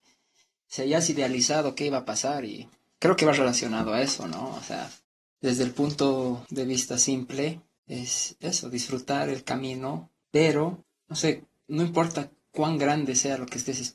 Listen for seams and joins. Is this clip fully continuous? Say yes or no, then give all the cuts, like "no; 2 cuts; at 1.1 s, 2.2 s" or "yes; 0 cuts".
yes; 0 cuts